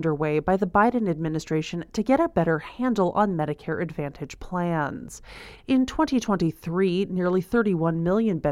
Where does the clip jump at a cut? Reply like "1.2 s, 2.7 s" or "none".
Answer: 5.6 s